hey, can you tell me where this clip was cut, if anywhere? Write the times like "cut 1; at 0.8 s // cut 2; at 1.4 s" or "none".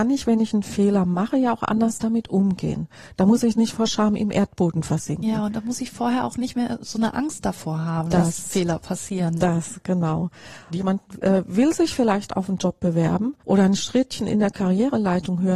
cut 1; at 10.7 s // cut 2; at 13.4 s